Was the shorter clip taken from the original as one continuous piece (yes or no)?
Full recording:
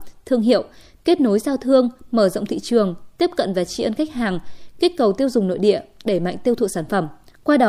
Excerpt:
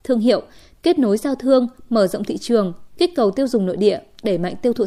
no